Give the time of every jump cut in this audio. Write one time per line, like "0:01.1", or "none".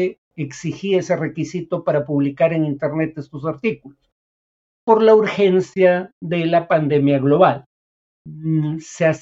none